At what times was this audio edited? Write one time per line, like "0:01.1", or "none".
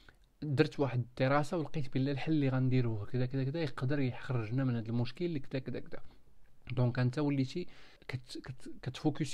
0:05.6
0:08.0